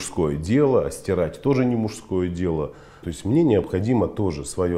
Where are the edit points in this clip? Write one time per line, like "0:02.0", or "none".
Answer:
0:03.0

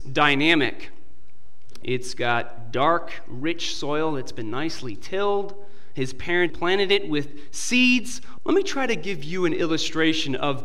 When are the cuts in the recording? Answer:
0:01.8
0:06.5
0:08.4

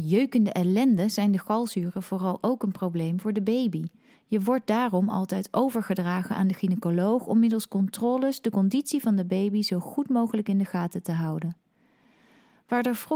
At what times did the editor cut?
0:04.1

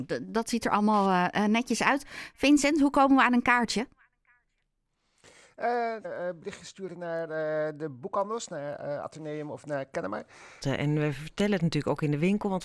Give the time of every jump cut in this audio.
0:06.0
0:10.6

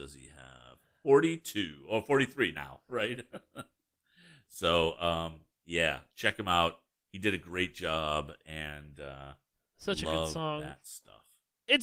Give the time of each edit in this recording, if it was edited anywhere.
none

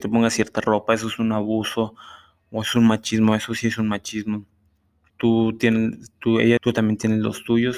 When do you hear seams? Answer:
0:05.1
0:06.6

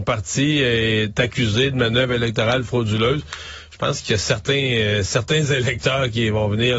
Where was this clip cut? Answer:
none

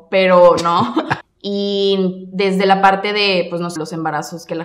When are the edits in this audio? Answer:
0:01.2
0:03.8

